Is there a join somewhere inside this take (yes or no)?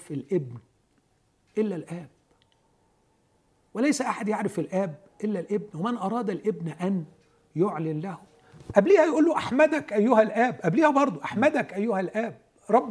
no